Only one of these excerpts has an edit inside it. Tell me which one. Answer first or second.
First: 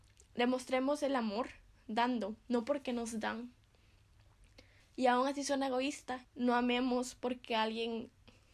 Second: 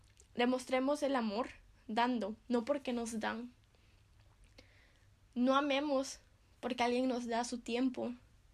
first